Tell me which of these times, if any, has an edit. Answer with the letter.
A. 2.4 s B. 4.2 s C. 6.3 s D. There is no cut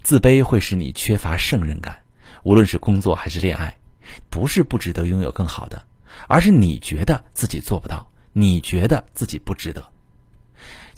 B